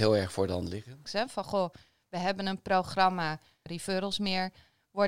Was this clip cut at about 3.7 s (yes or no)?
yes